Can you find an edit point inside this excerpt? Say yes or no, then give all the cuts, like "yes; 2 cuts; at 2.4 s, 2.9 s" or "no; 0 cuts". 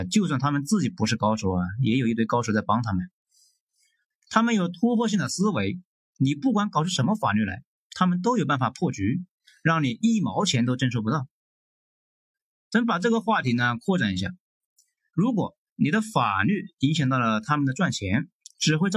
no; 0 cuts